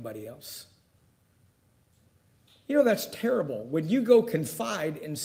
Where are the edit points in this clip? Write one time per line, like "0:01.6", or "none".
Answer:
none